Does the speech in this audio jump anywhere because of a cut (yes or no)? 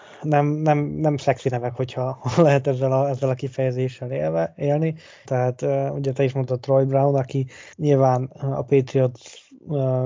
yes